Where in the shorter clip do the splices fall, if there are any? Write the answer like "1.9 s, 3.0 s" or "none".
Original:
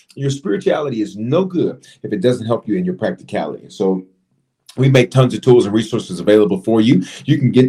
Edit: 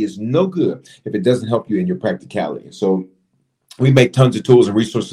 none